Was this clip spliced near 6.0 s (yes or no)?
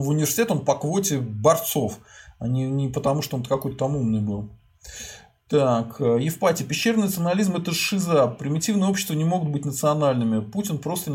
no